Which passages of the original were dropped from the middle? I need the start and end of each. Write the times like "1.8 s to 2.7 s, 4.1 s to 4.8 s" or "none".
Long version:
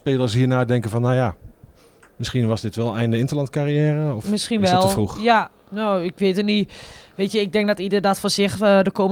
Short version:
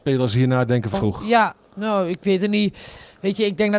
0.9 s to 4.9 s